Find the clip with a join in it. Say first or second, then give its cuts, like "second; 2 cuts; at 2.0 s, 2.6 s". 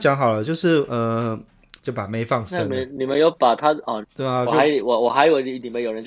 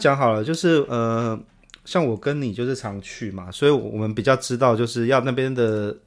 first; 2 cuts; at 1.8 s, 4.0 s